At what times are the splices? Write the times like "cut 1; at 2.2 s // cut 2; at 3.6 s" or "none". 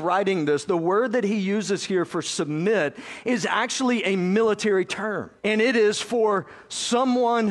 cut 1; at 5.4 s